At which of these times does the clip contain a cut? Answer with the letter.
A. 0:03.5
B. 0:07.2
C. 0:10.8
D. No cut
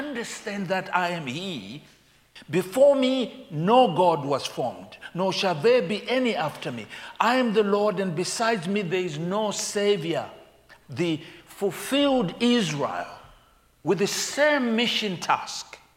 C